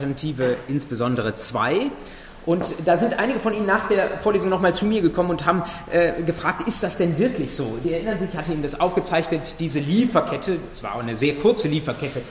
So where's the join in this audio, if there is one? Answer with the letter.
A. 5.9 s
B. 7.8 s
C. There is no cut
C